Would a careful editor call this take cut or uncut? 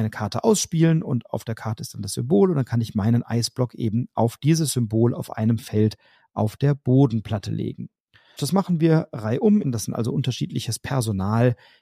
cut